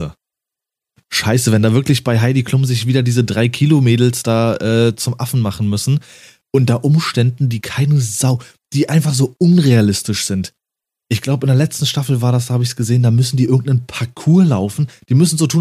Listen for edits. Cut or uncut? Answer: uncut